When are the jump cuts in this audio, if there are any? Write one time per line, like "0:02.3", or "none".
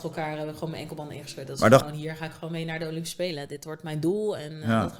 0:01.8